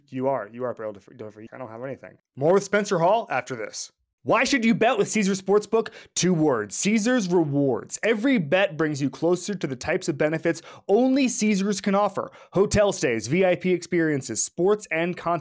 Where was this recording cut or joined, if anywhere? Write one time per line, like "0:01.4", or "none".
0:01.5